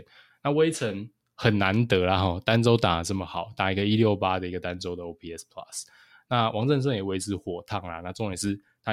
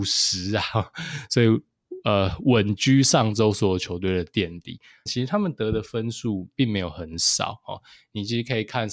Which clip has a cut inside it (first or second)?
second